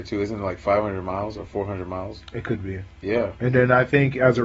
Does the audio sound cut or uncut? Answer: uncut